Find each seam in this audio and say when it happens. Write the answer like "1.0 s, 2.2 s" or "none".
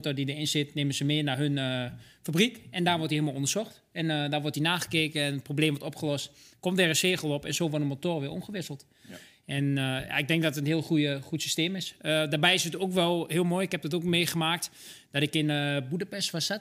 none

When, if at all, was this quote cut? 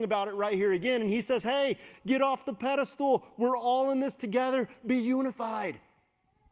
1.9 s

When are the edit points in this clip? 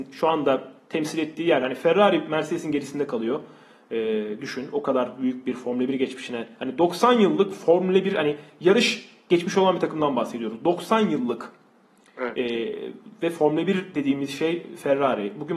none

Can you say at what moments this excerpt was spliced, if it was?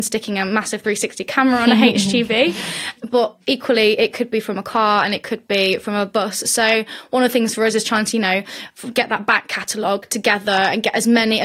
none

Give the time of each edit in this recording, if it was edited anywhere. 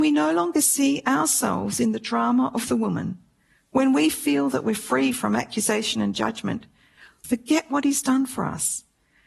7.2 s

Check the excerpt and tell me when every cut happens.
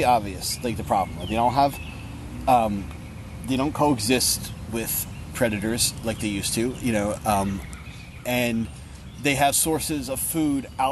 none

